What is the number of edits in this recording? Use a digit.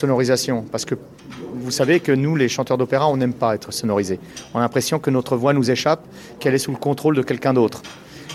0